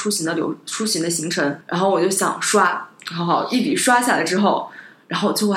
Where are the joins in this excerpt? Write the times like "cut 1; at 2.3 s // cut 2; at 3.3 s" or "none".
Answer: cut 1; at 1.6 s